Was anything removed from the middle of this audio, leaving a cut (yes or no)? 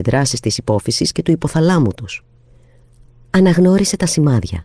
no